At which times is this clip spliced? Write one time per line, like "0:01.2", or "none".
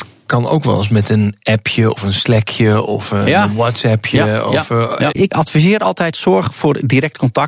0:05.1